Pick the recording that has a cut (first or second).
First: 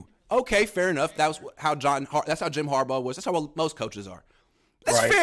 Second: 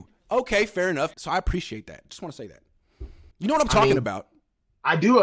second